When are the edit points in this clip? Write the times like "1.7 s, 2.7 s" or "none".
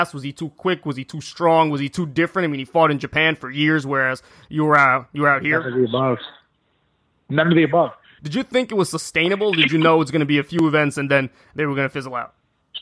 8.2 s